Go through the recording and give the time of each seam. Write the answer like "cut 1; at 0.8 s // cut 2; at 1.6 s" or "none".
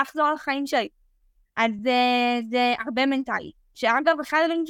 none